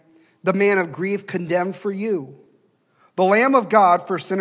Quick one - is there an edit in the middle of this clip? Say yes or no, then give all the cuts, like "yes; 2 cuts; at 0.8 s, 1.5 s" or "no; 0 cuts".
no; 0 cuts